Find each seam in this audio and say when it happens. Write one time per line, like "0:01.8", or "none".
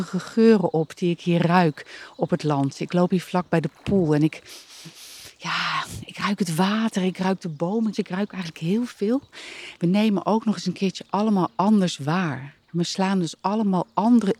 0:07.9
0:09.7
0:12.6